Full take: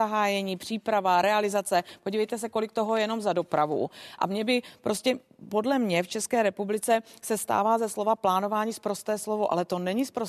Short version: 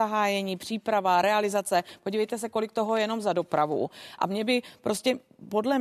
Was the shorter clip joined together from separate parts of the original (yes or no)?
no